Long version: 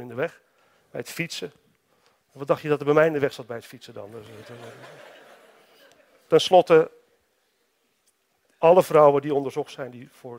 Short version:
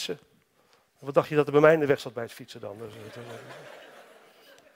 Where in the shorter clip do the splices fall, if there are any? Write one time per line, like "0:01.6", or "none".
none

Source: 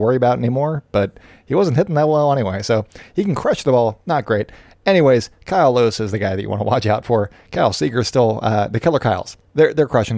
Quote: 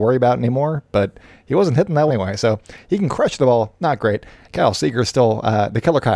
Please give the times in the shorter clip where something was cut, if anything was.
0:02.1
0:04.5

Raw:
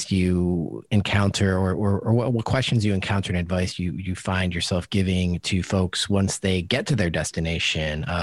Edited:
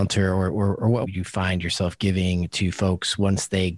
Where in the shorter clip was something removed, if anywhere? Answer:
0:01.0

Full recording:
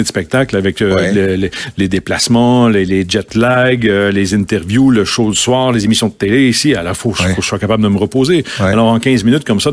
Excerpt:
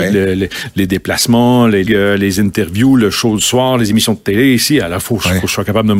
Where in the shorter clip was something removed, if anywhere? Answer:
0:01.9

